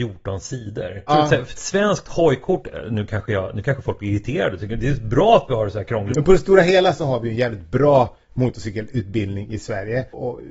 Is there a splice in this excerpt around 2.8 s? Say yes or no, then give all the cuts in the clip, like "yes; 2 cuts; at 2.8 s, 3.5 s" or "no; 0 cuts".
no; 2 cuts; at 1.1 s, 6.1 s